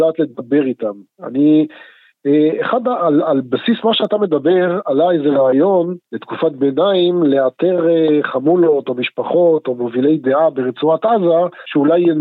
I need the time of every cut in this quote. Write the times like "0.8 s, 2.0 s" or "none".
6.0 s